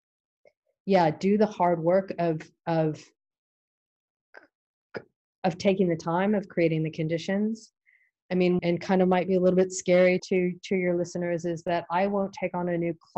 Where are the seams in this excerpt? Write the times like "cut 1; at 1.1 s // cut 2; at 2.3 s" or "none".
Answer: cut 1; at 8.6 s // cut 2; at 10.2 s